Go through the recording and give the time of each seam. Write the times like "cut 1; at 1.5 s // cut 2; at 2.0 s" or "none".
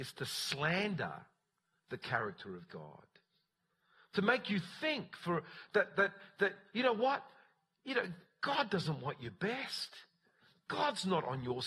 none